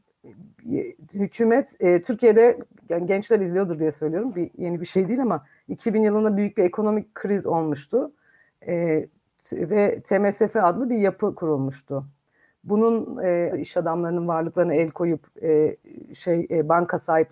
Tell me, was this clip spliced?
yes; 1 cut; at 13.5 s

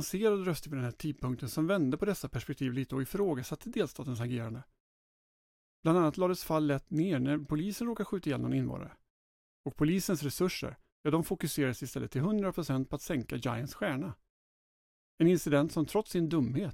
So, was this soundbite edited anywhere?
no; 0 cuts

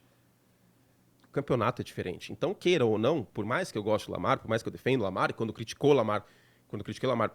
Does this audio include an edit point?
no; 0 cuts

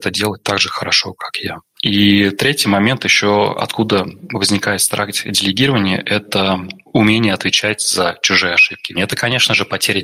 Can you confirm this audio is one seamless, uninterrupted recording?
no; 2 cuts; at 1.7 s, 8.9 s

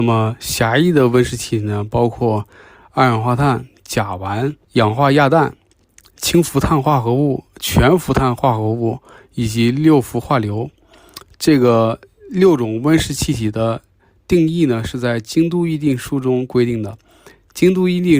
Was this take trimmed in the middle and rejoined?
yes; 1 cut; at 4.6 s

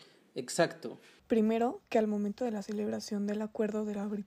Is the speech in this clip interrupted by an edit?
yes; 1 cut; at 1.2 s

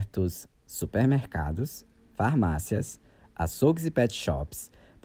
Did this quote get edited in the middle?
no; 0 cuts

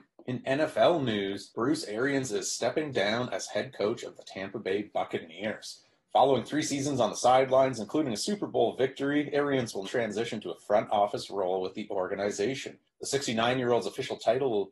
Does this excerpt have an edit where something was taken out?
yes; 1 cut; at 9.8 s

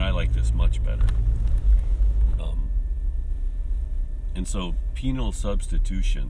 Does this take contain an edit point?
yes; 1 cut; at 2.4 s

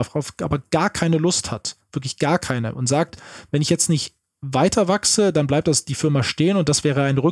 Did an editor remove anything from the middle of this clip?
no; 0 cuts

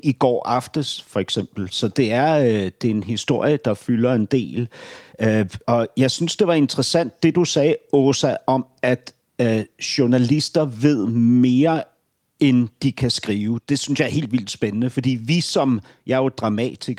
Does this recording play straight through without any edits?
no; 1 cut; at 5.6 s

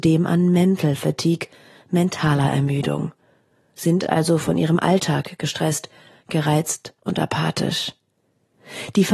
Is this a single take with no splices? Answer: yes; 0 cuts

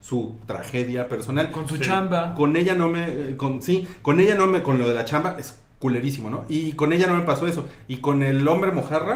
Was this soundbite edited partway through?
no; 0 cuts

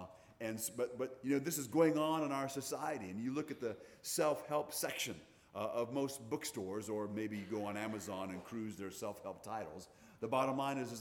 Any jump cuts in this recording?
no; 0 cuts

